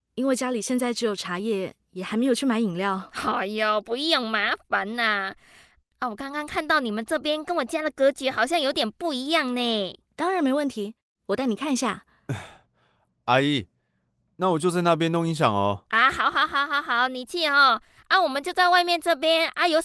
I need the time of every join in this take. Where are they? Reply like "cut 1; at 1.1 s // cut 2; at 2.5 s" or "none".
cut 1; at 5.8 s